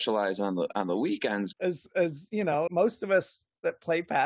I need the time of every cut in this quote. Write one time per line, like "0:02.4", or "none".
0:01.5
0:02.7